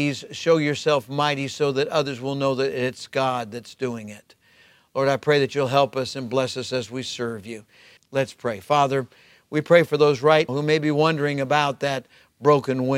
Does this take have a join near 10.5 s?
yes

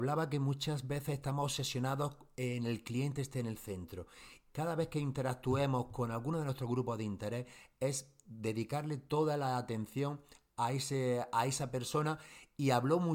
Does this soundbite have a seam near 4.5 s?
yes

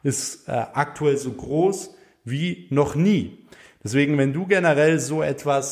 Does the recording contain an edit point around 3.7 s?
no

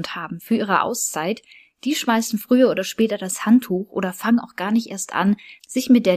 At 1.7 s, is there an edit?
no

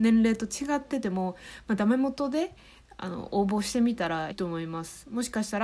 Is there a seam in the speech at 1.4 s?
no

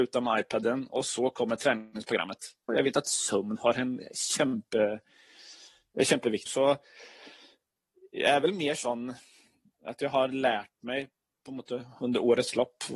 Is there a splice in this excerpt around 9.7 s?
no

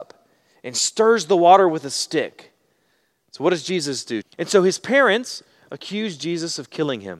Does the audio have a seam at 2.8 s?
no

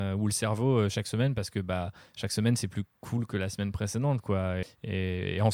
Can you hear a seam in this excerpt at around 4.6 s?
yes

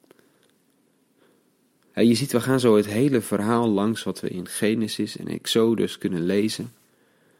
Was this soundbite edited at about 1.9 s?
yes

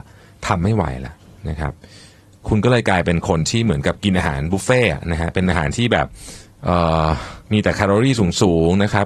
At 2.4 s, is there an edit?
no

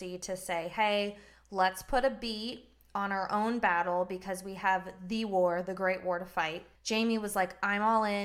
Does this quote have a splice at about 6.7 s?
yes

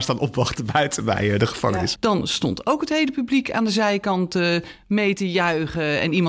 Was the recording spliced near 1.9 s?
yes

